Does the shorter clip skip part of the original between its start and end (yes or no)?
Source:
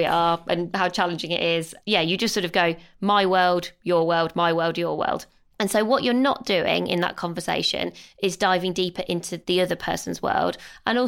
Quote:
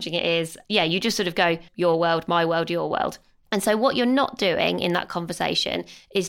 yes